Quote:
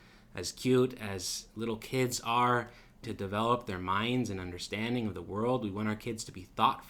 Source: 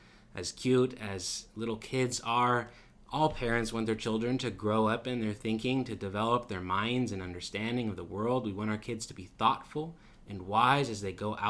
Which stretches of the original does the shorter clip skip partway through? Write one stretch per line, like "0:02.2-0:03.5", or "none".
0:03.0-0:05.9